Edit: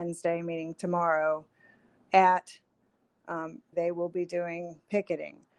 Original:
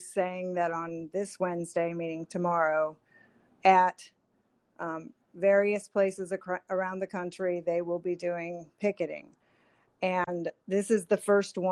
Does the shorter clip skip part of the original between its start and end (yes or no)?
yes